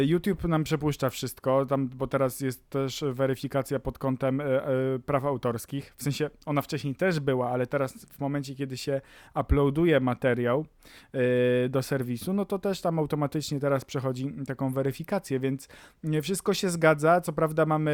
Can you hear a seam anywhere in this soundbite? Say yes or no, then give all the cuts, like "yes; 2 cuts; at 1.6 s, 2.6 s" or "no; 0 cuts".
no; 0 cuts